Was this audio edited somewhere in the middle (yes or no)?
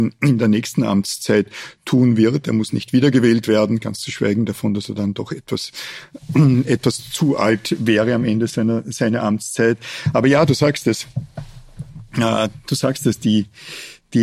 no